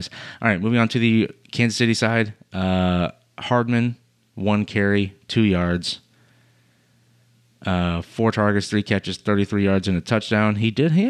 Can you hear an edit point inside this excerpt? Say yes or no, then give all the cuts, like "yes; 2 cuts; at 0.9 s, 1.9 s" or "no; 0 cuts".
no; 0 cuts